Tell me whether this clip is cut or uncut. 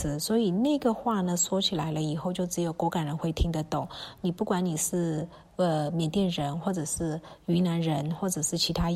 uncut